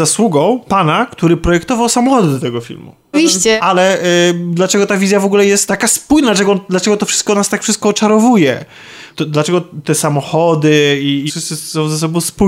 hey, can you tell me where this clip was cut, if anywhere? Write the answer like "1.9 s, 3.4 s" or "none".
3.1 s, 11.3 s